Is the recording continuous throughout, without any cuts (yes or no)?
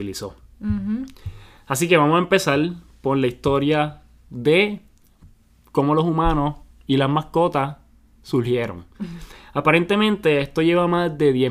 yes